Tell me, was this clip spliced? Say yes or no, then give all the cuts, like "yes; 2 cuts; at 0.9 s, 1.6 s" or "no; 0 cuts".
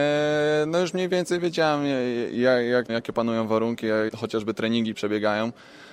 yes; 2 cuts; at 2.9 s, 4.1 s